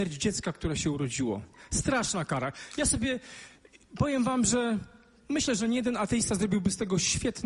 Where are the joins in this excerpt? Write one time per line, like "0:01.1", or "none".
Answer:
none